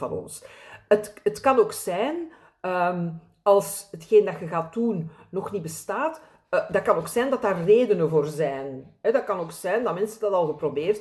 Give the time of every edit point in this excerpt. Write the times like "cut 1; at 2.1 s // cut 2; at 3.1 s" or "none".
none